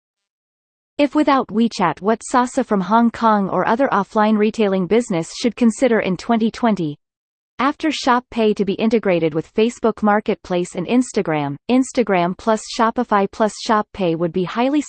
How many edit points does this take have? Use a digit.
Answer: 2